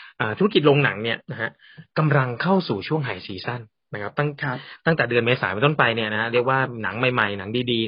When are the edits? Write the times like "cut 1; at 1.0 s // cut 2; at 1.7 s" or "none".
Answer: cut 1; at 1.2 s